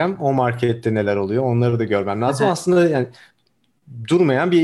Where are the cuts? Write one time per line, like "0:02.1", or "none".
none